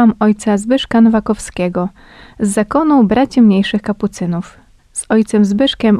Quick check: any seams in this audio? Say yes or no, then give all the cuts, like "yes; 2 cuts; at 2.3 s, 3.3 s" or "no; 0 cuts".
no; 0 cuts